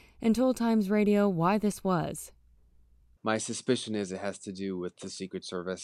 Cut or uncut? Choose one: uncut